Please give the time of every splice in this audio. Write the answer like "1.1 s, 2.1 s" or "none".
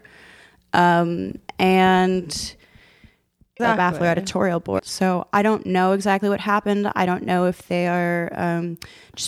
3.6 s, 4.8 s